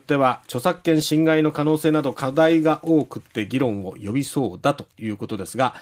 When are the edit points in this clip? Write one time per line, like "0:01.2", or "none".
none